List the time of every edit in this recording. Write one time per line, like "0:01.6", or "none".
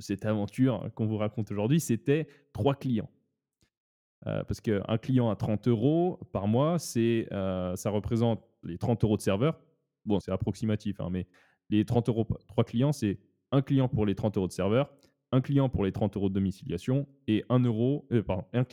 0:10.2